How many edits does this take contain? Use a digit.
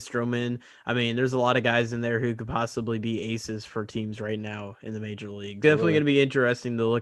1